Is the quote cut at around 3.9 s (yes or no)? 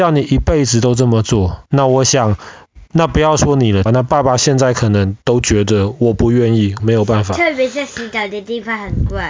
yes